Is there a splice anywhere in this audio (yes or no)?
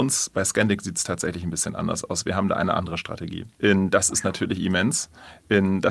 yes